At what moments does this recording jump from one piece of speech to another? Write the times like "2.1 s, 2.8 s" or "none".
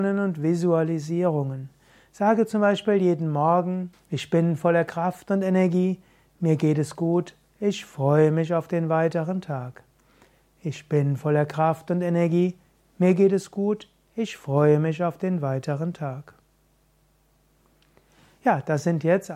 3.9 s